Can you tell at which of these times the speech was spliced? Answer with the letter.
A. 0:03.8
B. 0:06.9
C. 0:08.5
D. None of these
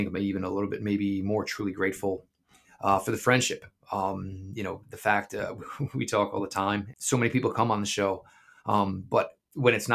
B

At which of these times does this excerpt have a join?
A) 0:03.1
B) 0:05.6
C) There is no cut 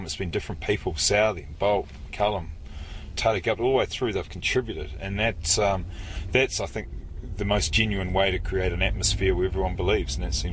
A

